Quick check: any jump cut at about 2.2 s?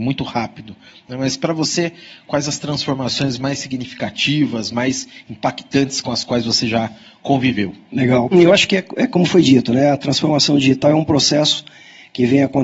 no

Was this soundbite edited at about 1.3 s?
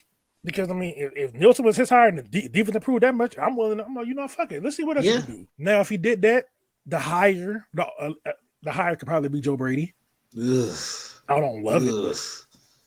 no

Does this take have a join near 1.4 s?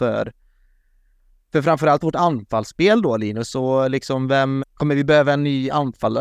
no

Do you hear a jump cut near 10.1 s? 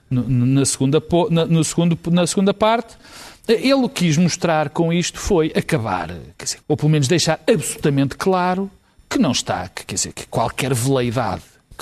yes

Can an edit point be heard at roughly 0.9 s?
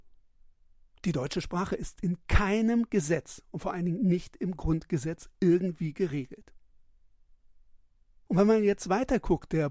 no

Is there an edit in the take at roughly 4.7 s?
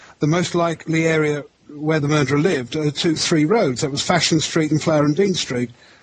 yes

